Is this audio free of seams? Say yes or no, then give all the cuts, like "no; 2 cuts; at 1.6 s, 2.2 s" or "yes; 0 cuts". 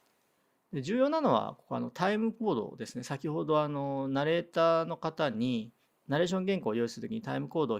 yes; 0 cuts